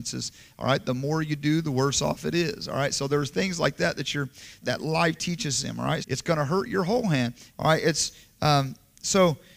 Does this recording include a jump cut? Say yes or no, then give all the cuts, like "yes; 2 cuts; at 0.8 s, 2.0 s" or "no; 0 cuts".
yes; 3 cuts; at 4.6 s, 6.0 s, 7.5 s